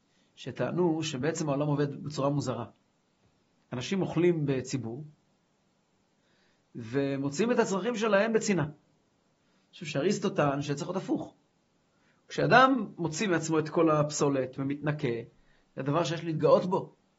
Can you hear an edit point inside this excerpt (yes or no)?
no